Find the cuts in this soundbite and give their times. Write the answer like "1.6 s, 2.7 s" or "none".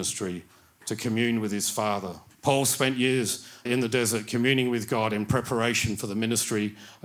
2.4 s, 3.7 s